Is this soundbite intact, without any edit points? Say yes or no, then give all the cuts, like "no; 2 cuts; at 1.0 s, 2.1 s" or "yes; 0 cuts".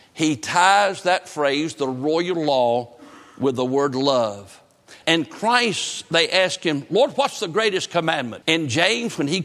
no; 2 cuts; at 5.0 s, 8.4 s